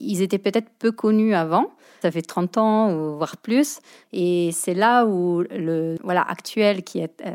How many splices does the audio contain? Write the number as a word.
two